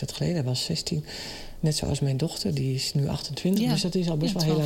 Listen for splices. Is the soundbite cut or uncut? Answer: uncut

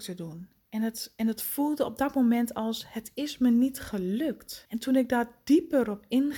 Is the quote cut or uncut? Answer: cut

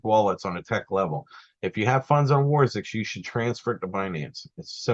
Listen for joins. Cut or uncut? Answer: uncut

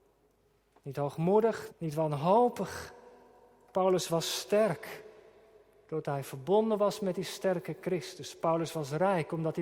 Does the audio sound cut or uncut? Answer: cut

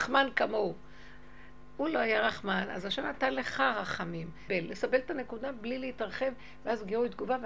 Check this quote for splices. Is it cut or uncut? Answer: cut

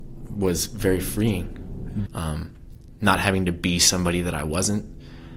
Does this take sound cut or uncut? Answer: cut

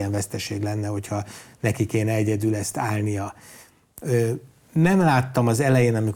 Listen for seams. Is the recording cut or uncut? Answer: uncut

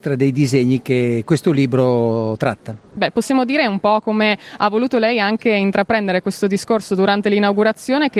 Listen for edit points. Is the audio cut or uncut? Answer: cut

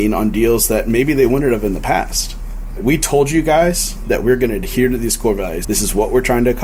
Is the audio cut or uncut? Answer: cut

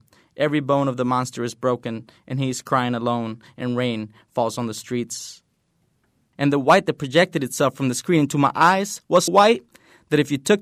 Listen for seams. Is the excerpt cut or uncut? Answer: cut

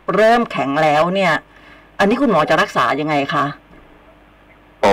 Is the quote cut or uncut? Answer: uncut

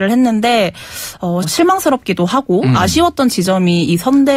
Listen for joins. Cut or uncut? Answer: cut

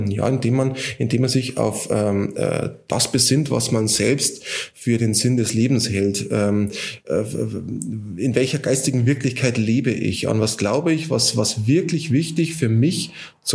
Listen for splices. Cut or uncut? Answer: uncut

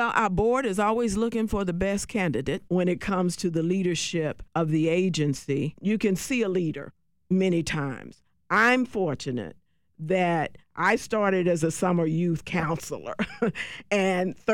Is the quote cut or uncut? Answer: cut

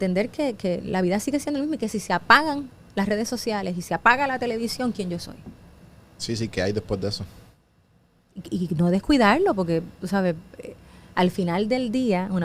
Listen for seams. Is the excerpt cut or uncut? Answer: uncut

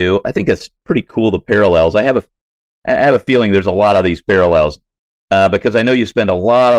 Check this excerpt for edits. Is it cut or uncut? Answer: uncut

